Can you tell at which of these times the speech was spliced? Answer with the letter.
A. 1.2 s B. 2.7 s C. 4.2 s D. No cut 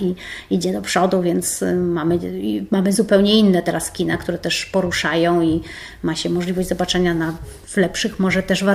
D